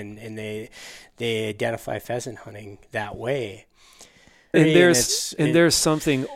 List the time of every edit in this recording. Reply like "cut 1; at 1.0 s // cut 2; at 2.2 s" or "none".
cut 1; at 4.5 s